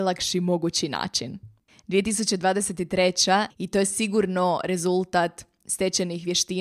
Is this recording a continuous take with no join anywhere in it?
no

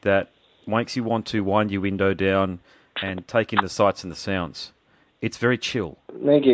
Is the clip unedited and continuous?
yes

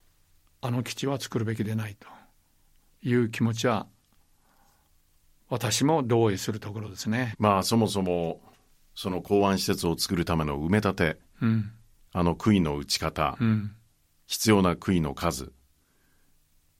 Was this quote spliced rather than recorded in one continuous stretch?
yes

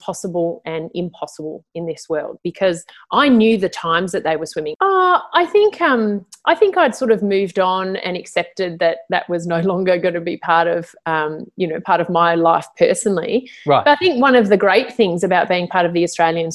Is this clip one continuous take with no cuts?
no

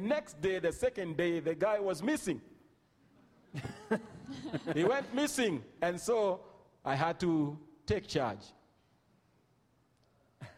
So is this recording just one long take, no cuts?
no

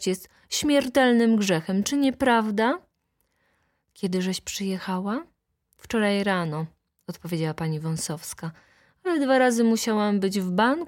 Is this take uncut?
yes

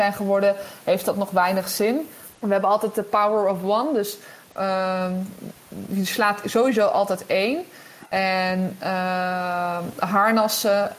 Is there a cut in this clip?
yes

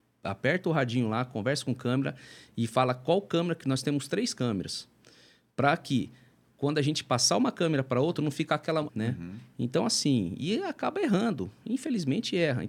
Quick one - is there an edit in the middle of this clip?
yes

